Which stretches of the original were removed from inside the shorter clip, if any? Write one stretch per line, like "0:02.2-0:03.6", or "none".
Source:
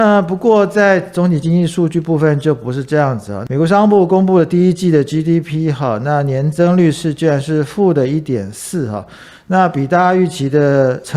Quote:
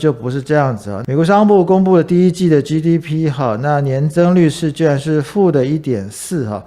none